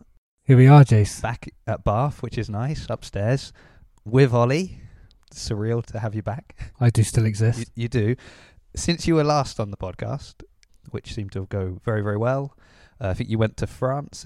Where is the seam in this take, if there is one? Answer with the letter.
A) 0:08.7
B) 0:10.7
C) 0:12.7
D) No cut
B